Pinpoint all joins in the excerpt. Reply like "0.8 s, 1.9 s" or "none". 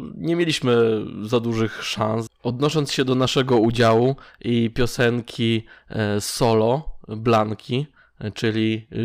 2.3 s